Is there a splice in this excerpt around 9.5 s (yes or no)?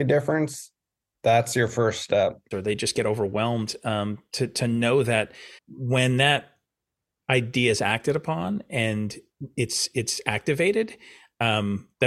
no